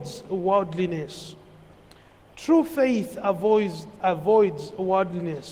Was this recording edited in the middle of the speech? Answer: no; 0 cuts

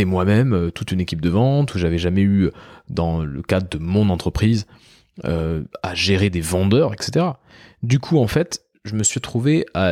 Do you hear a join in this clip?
no; 0 cuts

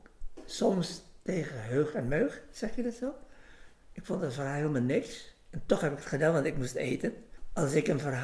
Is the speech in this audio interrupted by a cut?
no; 0 cuts

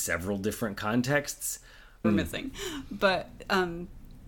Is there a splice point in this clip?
yes; 1 cut; at 2.0 s

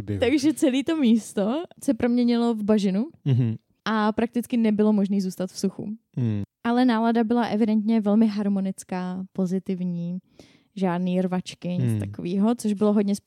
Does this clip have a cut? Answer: no; 0 cuts

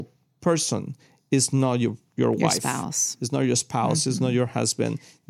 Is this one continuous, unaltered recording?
yes; 0 cuts

